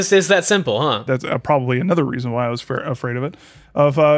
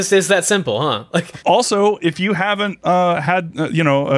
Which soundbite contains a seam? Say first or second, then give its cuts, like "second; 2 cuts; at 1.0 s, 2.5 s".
first; 1 cut; at 1.1 s